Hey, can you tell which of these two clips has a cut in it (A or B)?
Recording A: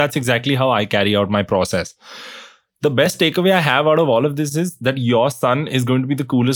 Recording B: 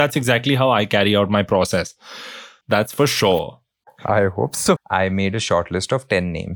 B